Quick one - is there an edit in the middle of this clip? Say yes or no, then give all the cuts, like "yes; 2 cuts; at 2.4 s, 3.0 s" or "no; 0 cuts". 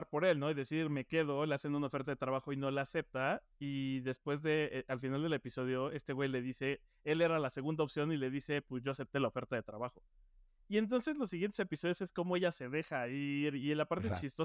no; 0 cuts